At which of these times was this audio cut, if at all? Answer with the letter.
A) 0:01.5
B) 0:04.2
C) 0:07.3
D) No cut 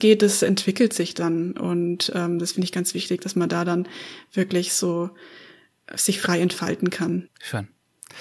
C